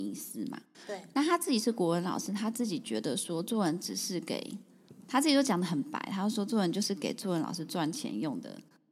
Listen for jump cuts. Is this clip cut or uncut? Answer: uncut